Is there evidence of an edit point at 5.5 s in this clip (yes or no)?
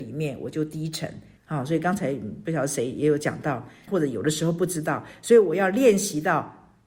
no